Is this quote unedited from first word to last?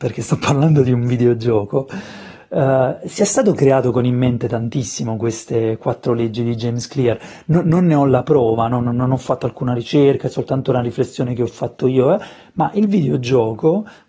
yes; 0 cuts

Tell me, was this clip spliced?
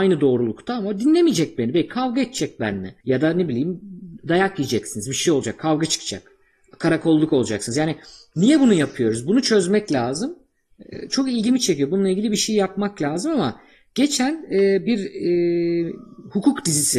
yes; 1 cut; at 3.0 s

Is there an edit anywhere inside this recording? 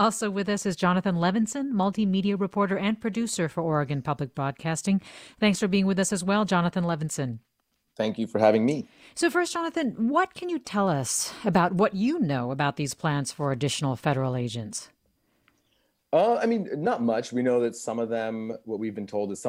no; 0 cuts

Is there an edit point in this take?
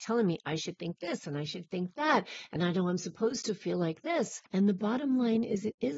yes; 1 cut; at 4.5 s

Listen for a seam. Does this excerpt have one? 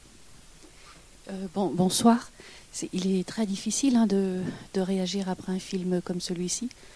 no; 0 cuts

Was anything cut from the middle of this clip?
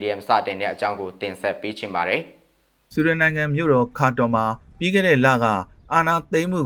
no; 0 cuts

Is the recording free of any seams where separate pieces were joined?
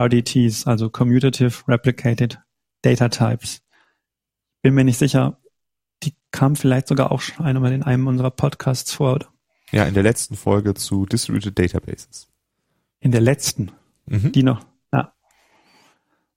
yes; 0 cuts

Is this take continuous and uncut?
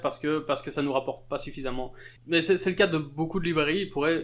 no; 1 cut; at 2.2 s

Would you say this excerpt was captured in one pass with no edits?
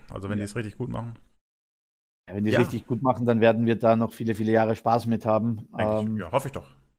yes; 0 cuts

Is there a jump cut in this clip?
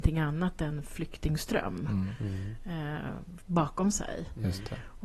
yes; 1 cut; at 3.4 s

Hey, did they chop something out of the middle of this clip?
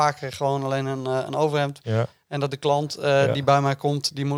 yes; 1 cut; at 1.8 s

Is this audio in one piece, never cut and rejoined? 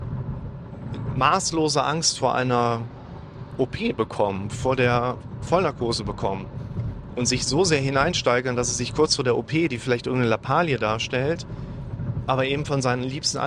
yes; 0 cuts

